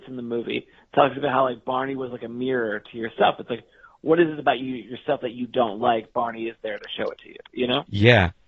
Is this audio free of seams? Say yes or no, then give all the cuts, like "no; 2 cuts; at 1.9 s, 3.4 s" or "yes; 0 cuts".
yes; 0 cuts